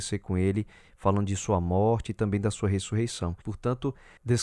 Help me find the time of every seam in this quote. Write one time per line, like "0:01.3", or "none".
0:03.4